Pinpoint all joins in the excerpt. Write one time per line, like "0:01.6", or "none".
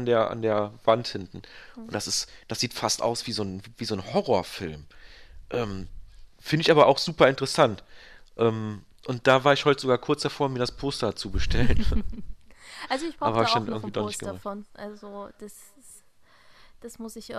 none